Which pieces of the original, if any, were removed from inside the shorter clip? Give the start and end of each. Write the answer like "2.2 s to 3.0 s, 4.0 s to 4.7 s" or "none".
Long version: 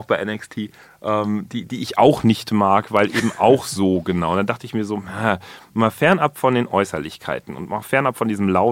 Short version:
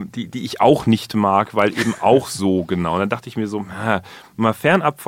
none